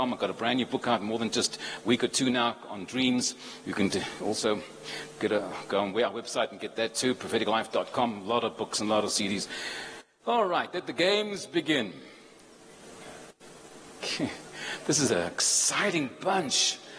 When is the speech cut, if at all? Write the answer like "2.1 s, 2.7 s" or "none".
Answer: none